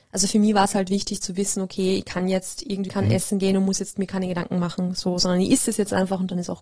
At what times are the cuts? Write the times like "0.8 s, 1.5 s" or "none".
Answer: 2.9 s